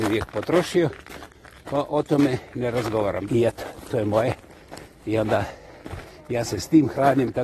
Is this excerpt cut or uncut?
cut